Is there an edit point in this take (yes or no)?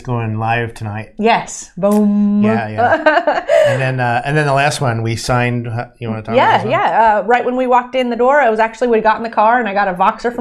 no